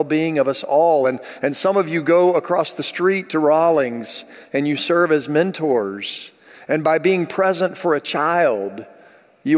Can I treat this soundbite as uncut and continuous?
yes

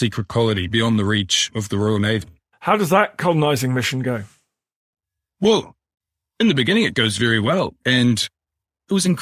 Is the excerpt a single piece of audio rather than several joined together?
no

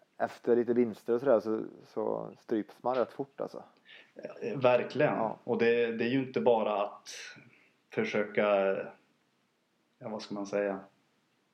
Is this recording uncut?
yes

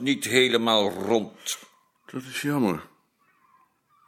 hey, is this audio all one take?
yes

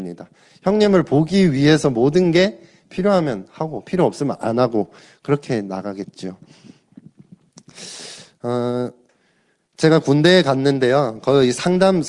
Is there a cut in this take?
no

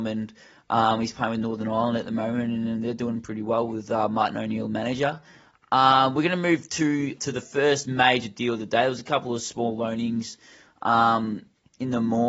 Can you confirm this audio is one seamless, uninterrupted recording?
no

